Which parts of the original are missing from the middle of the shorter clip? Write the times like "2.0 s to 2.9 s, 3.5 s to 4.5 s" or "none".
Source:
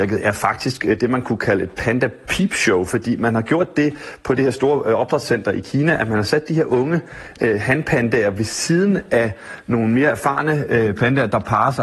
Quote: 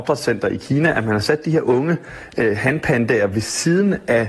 none